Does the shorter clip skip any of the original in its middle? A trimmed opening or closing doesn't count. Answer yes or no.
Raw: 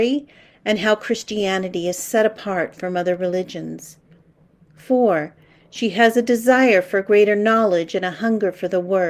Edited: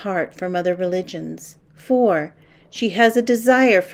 yes